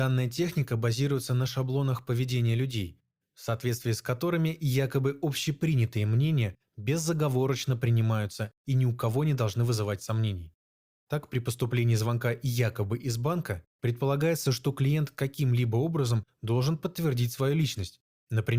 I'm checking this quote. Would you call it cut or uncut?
cut